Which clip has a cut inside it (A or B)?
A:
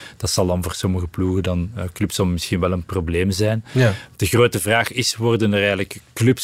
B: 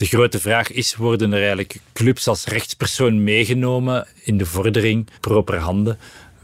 B